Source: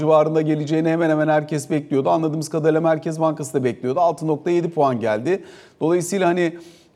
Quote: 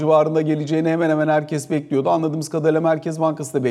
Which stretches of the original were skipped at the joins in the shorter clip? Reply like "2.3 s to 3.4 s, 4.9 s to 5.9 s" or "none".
none

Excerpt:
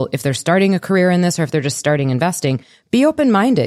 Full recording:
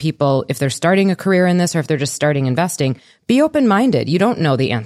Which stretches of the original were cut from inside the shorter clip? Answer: none

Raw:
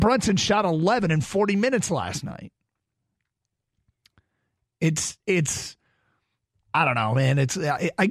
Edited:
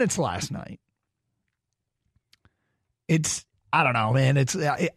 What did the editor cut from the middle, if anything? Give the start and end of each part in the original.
5.2 s to 6.5 s

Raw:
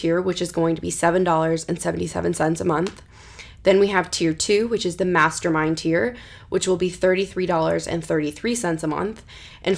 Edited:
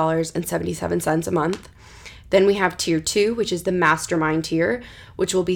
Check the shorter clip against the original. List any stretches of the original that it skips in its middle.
none

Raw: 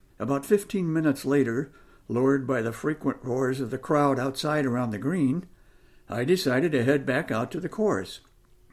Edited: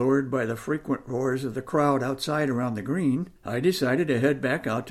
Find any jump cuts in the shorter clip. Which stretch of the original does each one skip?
5.5 s to 6.0 s

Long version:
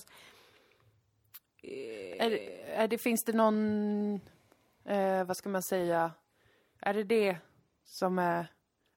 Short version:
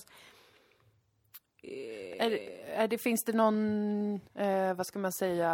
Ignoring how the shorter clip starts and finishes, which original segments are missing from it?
4.3 s to 4.8 s

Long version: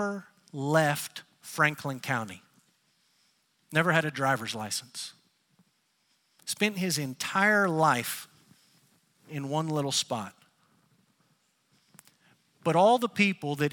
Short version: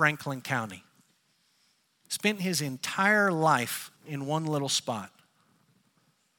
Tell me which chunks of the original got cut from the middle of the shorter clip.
3.6 s to 6.4 s, 8.3 s to 9.2 s

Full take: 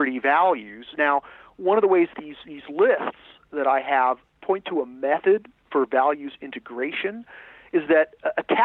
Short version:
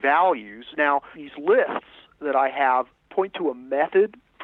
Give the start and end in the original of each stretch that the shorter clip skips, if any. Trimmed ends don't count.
1.3 s to 2.4 s

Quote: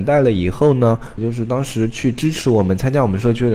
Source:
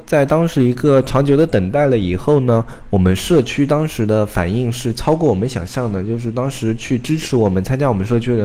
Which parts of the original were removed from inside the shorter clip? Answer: 2.8 s to 6.0 s

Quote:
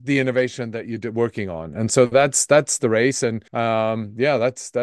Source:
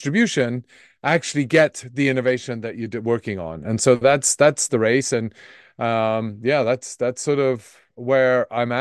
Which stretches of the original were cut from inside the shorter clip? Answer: 5.4 s to 5.7 s

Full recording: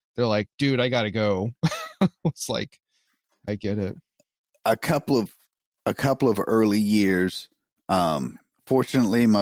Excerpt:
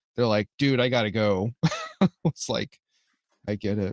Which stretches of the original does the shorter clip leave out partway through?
none

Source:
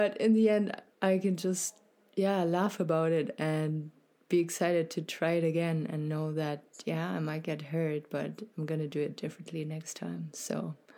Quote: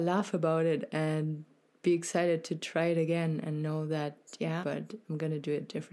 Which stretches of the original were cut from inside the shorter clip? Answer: 7.1 s to 8.1 s

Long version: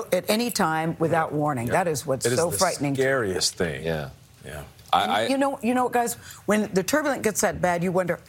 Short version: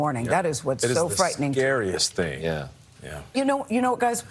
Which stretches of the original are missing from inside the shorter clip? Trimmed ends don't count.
4.8 s to 5.3 s

